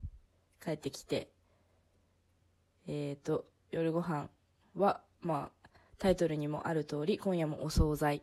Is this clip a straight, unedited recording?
yes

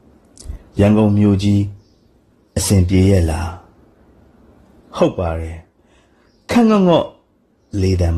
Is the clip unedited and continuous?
yes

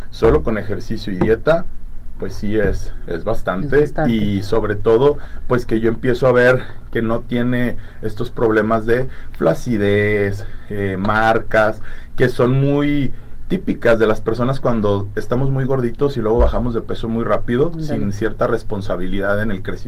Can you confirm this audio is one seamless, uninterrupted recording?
yes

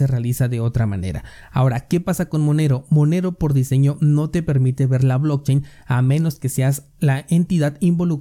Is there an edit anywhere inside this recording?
no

